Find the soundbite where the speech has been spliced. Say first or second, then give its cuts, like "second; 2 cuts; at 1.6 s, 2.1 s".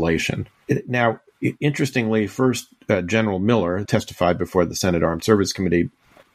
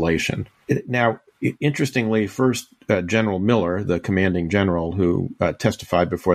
first; 1 cut; at 3.8 s